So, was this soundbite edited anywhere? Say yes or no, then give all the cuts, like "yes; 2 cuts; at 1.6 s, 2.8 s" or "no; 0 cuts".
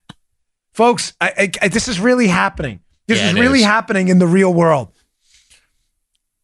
no; 0 cuts